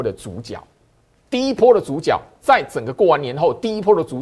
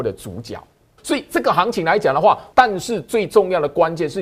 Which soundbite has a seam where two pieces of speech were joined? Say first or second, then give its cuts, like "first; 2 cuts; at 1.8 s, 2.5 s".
second; 2 cuts; at 1.0 s, 2.5 s